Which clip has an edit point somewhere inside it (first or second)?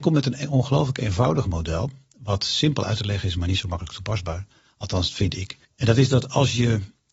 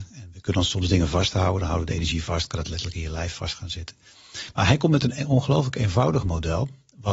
first